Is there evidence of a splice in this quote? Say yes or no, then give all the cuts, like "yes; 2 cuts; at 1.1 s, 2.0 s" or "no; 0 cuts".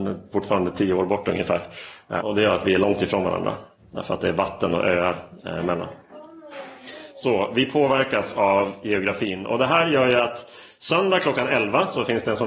yes; 1 cut; at 2.2 s